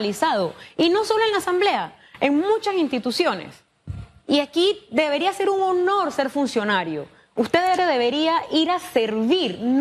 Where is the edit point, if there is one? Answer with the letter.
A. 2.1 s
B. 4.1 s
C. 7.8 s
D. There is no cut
C